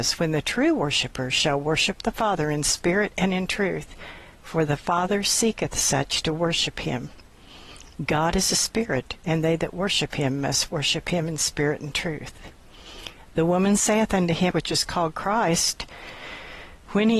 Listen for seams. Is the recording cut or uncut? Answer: cut